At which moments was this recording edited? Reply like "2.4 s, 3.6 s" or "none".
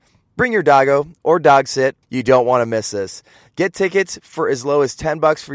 2.0 s